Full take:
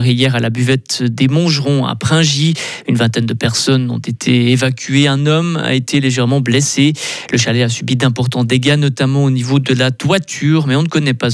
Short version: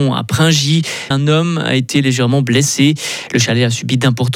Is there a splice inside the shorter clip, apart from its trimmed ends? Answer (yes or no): yes